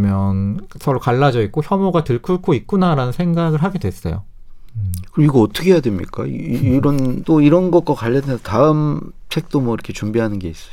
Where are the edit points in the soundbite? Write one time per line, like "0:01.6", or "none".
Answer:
0:07.2

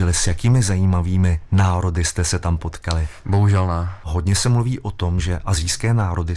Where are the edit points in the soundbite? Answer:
0:03.2

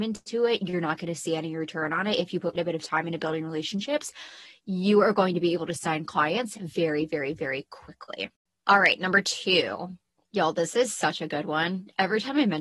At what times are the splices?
0:02.5

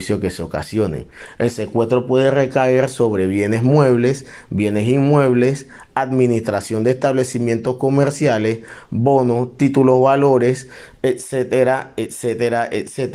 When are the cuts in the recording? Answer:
none

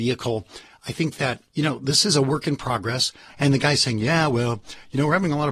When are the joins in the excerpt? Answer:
0:01.5
0:03.3

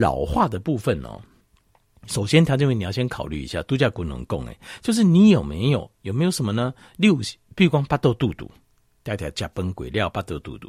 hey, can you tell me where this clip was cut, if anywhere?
none

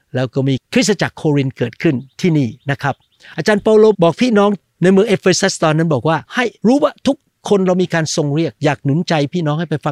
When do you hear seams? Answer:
0:03.9
0:06.3

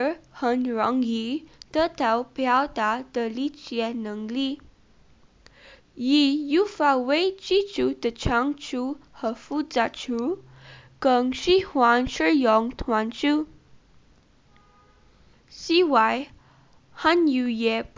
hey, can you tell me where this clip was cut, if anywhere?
0:05.8
0:15.3

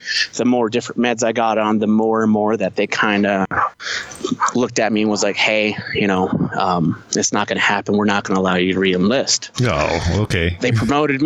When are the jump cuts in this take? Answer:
0:09.5

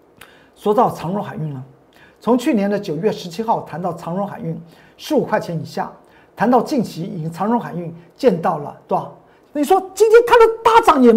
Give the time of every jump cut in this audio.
0:09.4

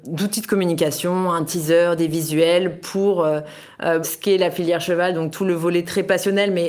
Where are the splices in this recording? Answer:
0:04.0

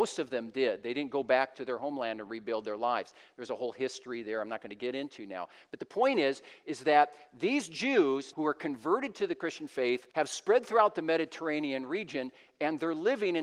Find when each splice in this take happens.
0:08.3
0:10.1

